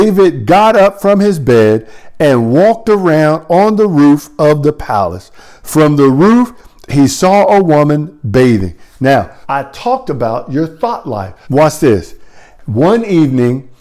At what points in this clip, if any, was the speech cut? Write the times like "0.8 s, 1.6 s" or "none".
9.4 s, 11.4 s